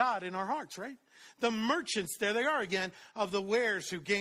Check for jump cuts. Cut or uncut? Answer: uncut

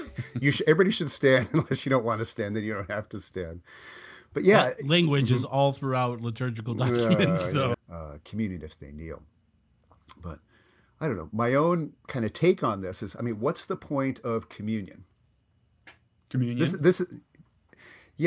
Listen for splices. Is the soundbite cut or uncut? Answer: cut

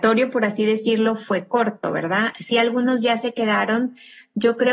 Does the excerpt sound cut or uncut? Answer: uncut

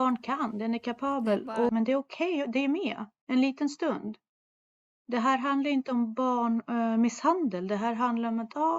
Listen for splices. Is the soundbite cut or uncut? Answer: cut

